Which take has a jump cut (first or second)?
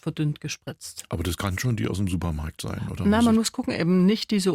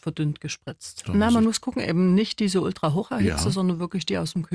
second